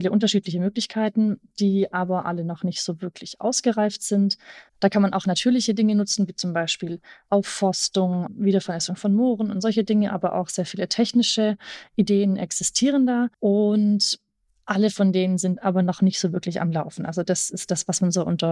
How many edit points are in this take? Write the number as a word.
one